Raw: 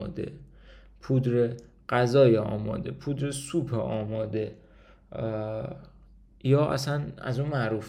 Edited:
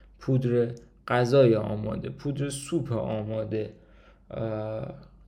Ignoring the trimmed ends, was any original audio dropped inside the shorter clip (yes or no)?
no